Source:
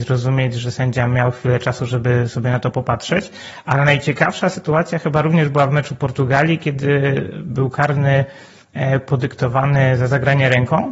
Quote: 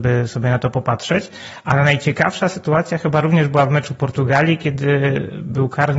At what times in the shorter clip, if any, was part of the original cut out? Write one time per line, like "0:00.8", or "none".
none